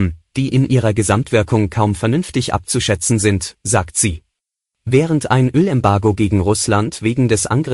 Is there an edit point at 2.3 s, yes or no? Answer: no